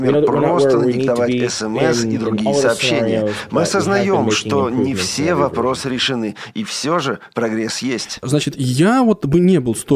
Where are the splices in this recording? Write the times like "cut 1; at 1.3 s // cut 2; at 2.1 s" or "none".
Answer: cut 1; at 8.2 s